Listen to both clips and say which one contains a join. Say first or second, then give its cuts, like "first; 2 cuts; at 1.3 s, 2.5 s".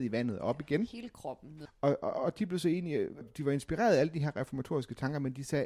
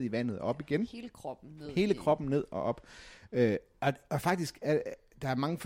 first; 2 cuts; at 1.7 s, 3.2 s